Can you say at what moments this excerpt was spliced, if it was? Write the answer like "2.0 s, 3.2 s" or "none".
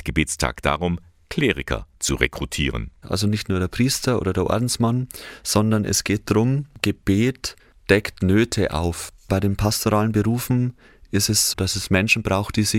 3.0 s, 11.5 s